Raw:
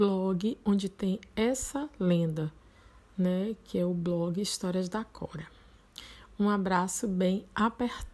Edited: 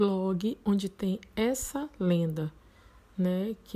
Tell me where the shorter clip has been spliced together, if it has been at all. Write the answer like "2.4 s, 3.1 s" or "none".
none